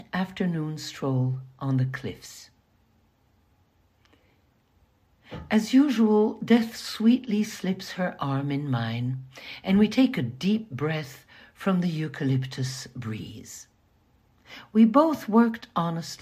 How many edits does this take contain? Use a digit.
0